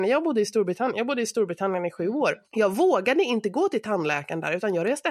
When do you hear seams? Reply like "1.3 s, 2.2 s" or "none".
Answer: 2.4 s